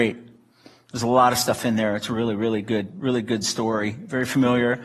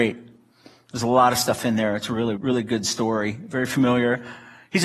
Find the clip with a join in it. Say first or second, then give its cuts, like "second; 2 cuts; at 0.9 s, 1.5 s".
second; 1 cut; at 2.4 s